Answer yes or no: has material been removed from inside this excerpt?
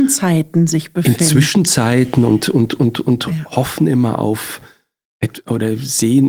no